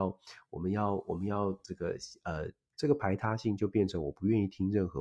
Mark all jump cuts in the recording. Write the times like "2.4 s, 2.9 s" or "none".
2.7 s